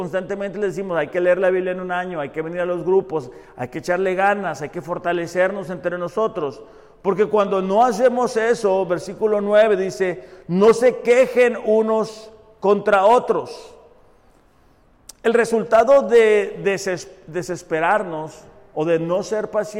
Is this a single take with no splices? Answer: yes; 0 cuts

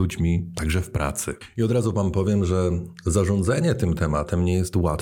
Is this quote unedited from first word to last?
yes; 0 cuts

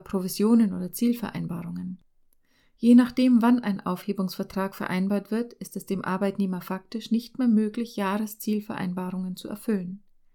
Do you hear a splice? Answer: no; 0 cuts

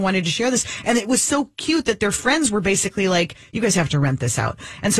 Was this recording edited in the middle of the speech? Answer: no; 0 cuts

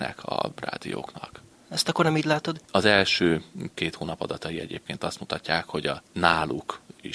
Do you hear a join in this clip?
yes; 2 cuts; at 1.5 s, 2.7 s

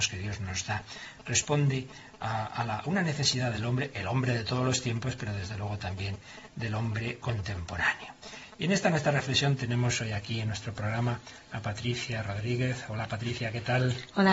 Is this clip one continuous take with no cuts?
yes; 0 cuts

